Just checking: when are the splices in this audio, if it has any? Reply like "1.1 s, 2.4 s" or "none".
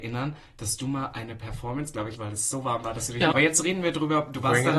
2.2 s, 3.3 s